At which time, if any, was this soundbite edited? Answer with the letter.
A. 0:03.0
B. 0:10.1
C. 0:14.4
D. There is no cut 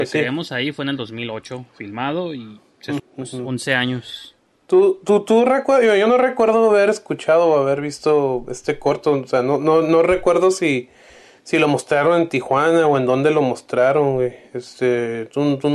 A